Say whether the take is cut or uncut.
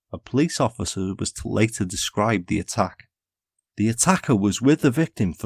uncut